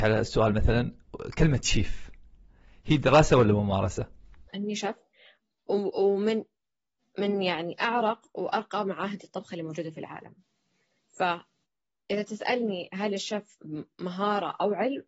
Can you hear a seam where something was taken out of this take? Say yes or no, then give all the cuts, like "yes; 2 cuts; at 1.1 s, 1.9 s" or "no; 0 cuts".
yes; 1 cut; at 4.5 s